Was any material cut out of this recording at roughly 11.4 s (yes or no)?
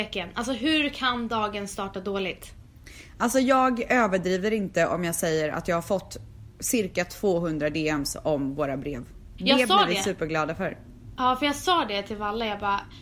no